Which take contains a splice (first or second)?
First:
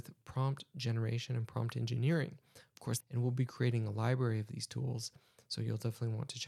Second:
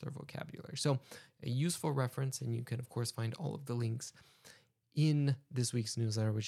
first